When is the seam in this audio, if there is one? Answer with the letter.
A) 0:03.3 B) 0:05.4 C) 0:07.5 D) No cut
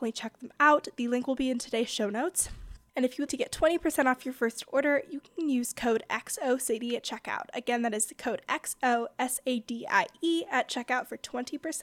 A